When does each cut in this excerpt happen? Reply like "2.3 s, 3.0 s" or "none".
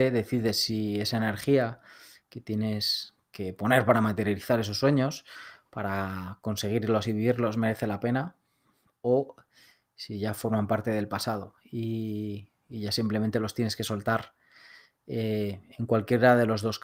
none

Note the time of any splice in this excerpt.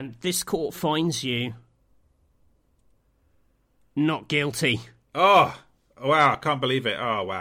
none

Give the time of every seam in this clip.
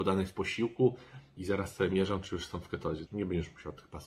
1.4 s, 3.1 s

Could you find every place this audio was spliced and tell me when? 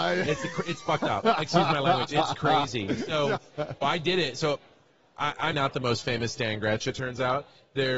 3.8 s, 5.5 s

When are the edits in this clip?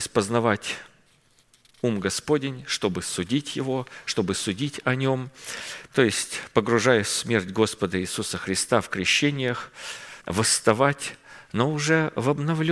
5.9 s, 10.2 s

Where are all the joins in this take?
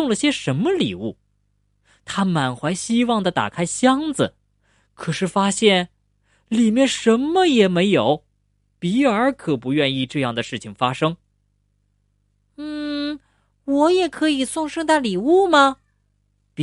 8.7 s

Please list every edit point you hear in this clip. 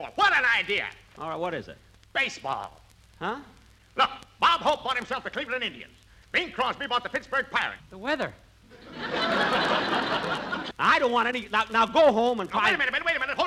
7.8 s, 10.7 s

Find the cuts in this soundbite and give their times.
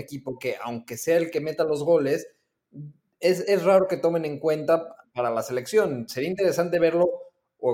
5.1 s

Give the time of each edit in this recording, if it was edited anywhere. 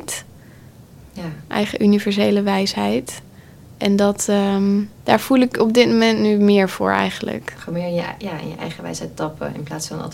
4.9 s

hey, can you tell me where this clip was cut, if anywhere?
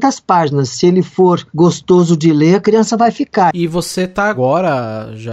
3.5 s

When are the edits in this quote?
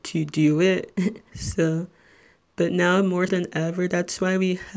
1.3 s, 3.3 s

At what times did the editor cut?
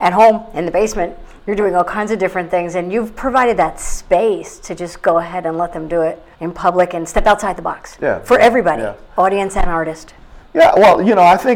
6.3 s

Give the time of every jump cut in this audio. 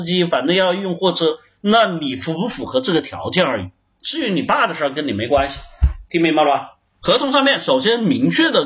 7.0 s

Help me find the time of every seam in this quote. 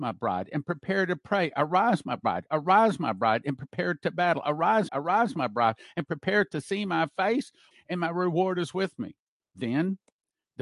4.9 s, 7.7 s

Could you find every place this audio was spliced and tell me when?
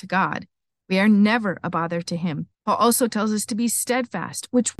2.5 s

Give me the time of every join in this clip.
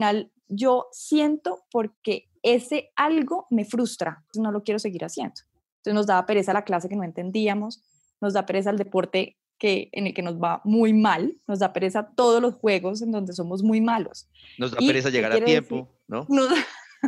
4.3 s

